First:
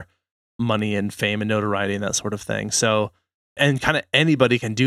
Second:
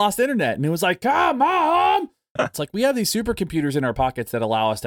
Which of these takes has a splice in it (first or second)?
second